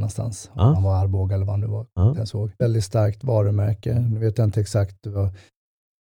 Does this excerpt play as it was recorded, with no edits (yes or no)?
no